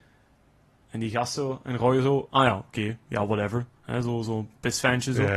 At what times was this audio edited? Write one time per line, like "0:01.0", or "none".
none